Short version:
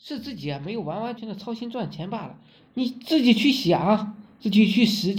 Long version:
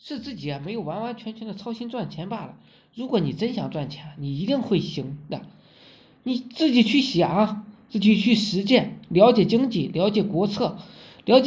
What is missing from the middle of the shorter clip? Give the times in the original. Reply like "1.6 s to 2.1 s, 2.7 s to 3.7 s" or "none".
1.2 s to 1.3 s, 2.8 s to 6.1 s